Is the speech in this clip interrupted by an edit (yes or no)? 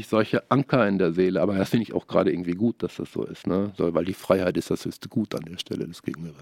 no